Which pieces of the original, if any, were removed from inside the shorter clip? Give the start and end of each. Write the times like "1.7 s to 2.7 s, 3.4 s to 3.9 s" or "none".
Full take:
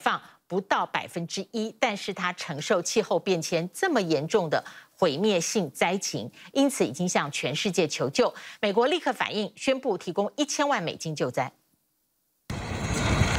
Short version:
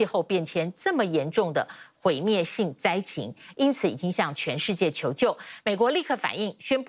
none